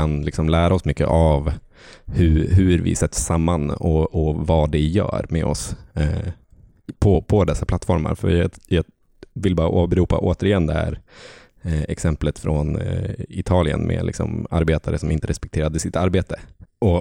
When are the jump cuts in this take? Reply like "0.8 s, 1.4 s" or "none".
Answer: none